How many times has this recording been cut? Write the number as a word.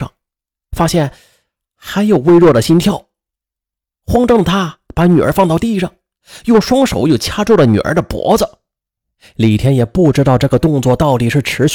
zero